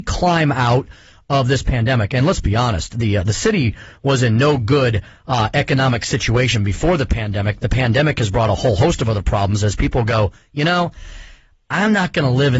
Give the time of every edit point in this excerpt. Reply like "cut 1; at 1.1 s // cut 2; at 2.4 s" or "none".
none